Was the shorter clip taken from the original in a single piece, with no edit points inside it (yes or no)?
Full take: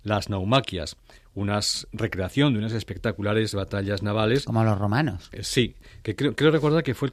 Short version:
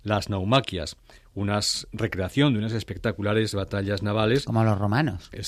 yes